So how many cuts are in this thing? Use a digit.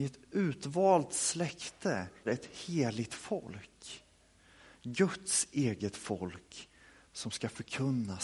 1